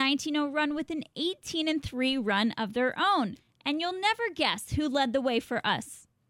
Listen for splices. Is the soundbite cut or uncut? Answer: uncut